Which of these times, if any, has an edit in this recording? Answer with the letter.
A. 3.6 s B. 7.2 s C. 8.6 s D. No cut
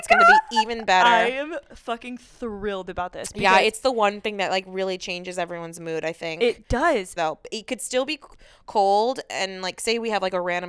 B